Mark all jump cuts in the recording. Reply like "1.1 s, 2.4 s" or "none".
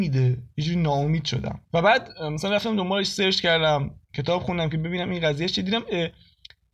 1.7 s